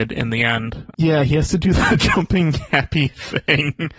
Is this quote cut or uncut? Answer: cut